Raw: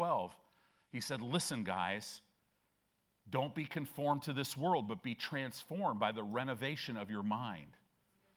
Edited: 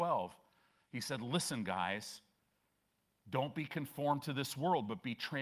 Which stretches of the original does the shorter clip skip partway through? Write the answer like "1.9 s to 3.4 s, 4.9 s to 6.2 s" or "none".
none